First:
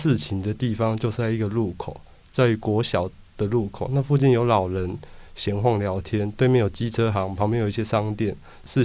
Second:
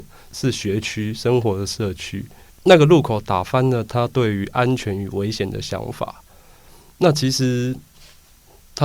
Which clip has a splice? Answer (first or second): second